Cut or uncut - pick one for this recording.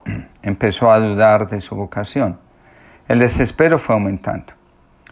uncut